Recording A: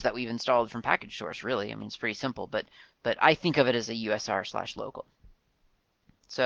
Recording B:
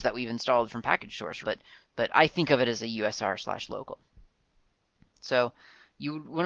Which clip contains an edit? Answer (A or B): B